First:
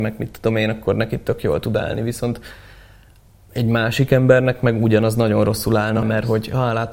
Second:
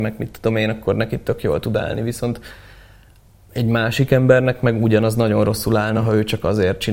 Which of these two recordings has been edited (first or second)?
first